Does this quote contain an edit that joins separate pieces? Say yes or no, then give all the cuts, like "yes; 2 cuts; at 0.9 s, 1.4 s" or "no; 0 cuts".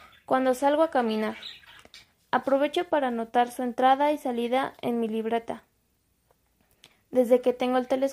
yes; 1 cut; at 2.1 s